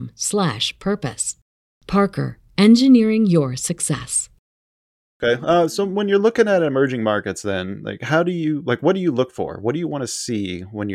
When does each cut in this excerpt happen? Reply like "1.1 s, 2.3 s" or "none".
none